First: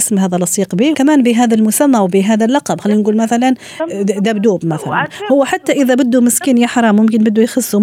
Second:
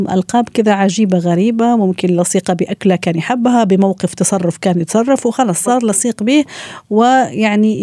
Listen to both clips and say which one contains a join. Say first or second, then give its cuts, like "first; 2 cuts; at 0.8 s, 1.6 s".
first; 1 cut; at 0.9 s